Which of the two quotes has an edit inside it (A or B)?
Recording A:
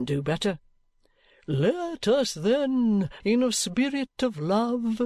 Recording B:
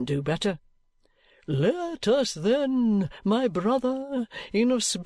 A